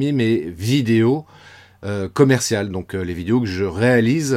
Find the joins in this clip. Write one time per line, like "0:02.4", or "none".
none